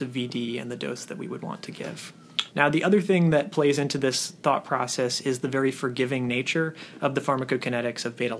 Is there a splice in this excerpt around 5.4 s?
no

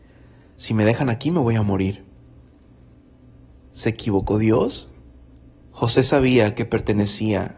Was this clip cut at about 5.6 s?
yes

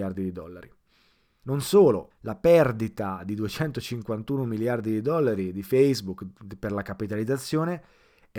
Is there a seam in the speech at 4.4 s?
no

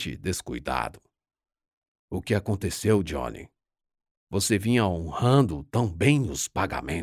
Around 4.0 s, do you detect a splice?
no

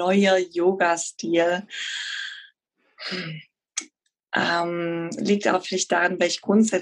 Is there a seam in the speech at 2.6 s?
no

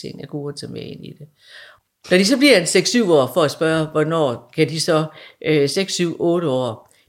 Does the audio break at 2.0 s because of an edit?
no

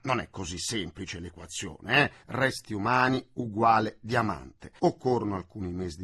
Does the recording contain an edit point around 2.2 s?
no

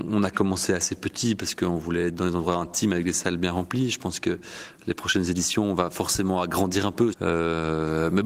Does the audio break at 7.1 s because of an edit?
yes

